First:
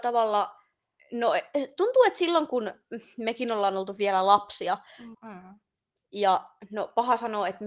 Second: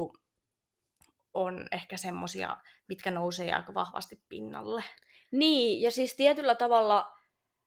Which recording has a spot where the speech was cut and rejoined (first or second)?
first